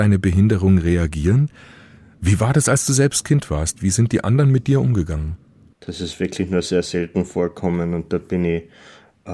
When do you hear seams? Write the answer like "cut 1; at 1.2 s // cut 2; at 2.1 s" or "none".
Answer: cut 1; at 5.7 s